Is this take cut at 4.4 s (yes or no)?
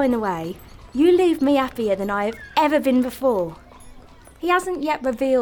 yes